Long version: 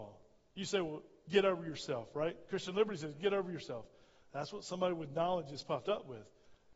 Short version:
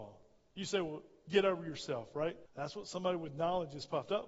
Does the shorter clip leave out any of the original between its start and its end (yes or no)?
yes